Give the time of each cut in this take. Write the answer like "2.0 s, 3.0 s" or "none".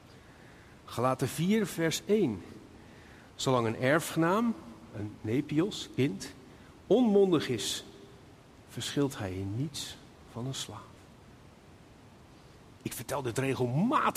none